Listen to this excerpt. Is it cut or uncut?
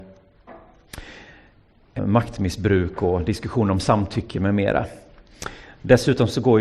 cut